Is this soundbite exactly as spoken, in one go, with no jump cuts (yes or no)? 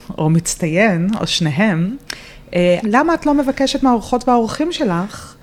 no